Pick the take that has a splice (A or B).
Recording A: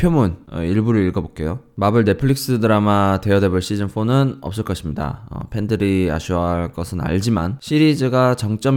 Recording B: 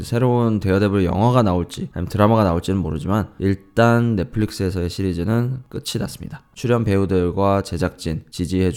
B